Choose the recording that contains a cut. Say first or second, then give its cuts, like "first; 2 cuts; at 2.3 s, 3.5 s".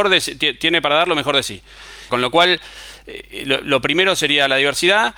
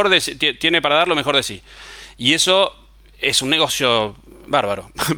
first; 1 cut; at 2.1 s